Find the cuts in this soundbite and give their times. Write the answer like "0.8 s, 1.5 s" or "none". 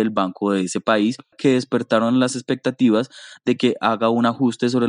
1.3 s